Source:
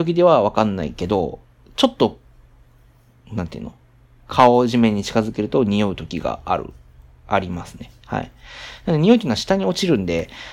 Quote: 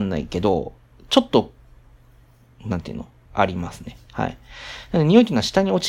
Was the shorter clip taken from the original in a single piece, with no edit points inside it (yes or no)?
no